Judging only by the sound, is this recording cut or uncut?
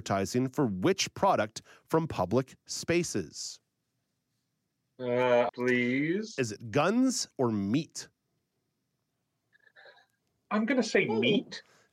cut